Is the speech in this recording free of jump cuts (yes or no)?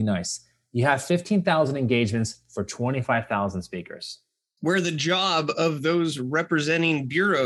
yes